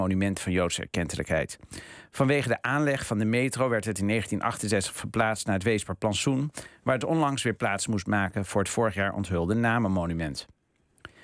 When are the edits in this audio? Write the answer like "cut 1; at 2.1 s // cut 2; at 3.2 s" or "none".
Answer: none